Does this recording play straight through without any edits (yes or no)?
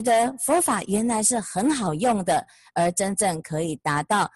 yes